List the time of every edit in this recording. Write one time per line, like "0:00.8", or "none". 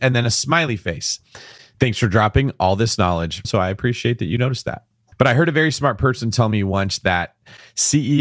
0:03.4
0:05.1